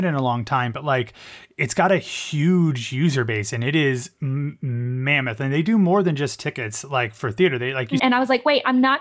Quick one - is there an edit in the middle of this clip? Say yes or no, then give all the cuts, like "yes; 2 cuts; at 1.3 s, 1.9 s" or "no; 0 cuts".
yes; 1 cut; at 8.0 s